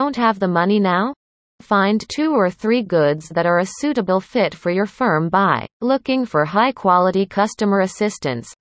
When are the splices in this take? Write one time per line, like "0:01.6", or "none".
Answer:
0:01.4
0:05.7